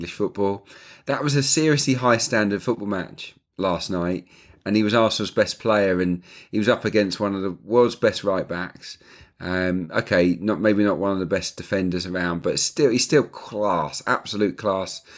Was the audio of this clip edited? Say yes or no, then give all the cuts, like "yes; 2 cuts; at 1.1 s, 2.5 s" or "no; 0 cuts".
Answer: no; 0 cuts